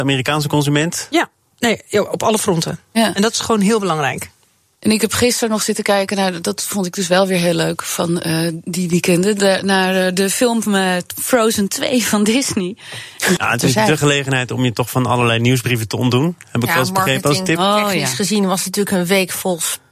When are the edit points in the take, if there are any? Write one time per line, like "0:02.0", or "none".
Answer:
0:13.4